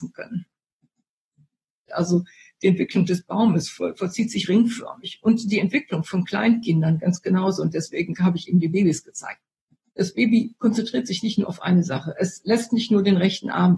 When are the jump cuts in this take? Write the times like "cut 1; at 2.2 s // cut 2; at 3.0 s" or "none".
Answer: cut 1; at 1.9 s